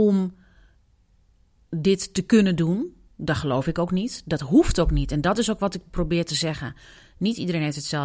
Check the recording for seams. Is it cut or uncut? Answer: uncut